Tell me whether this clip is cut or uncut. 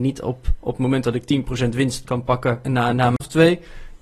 cut